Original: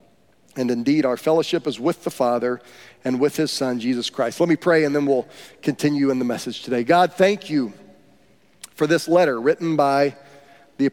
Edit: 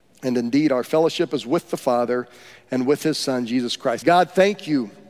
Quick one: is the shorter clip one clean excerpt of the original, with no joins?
no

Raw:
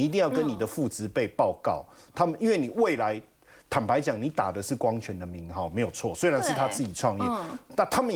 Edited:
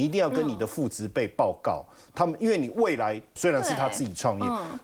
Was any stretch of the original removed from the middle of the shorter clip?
yes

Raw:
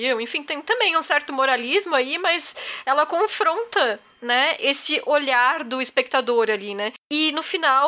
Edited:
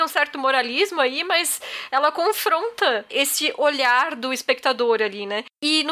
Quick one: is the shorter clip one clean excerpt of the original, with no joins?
no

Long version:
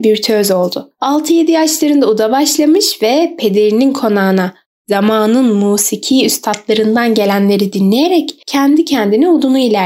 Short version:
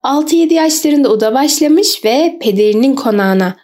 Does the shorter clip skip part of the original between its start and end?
no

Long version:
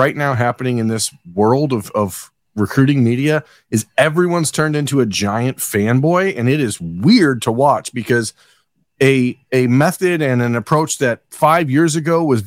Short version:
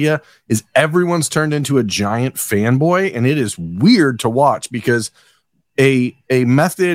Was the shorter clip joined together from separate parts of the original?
no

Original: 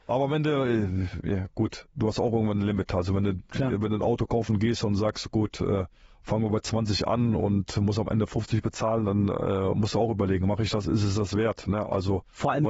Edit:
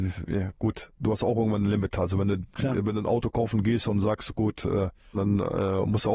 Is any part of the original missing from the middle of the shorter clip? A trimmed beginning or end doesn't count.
yes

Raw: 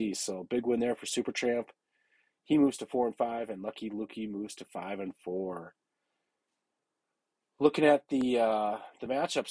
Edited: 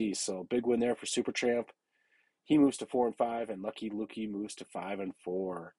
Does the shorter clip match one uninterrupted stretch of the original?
yes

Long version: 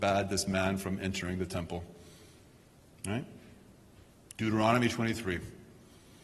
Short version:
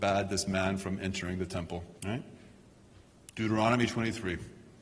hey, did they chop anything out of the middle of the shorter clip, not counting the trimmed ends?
yes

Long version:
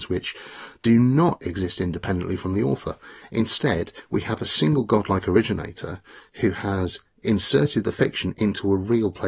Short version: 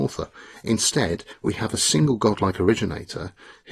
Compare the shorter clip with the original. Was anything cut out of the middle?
no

